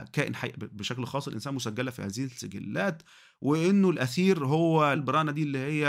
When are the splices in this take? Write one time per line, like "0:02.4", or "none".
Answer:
0:04.9